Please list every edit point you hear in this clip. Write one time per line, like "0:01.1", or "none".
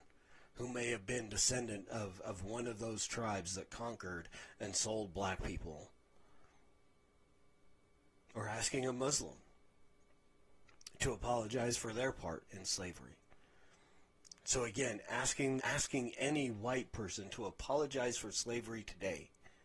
0:14.4
0:15.6